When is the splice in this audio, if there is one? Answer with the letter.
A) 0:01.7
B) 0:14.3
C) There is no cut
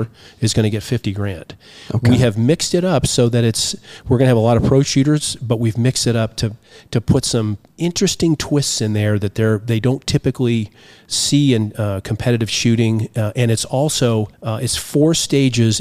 B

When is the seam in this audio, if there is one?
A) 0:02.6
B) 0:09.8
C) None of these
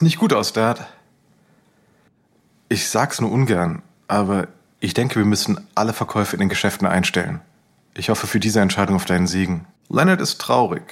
B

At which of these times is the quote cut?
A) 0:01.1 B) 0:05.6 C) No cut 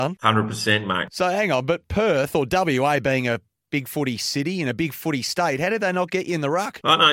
A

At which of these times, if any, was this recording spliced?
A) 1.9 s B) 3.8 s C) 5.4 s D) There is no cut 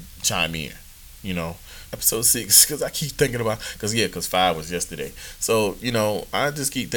A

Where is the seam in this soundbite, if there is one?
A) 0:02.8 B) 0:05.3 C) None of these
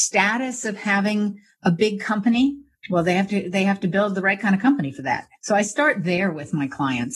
B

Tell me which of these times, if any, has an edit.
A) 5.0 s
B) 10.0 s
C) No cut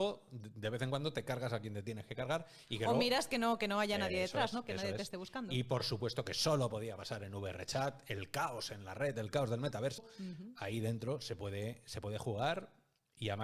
B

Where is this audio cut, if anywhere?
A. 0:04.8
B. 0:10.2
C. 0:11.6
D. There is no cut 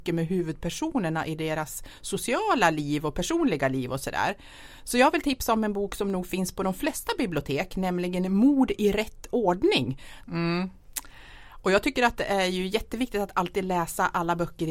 B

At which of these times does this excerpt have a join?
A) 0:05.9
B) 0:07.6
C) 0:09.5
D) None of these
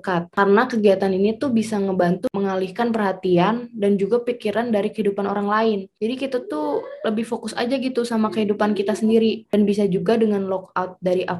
C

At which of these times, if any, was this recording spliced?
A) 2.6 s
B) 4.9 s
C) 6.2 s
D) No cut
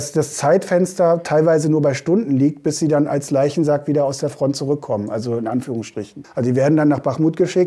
C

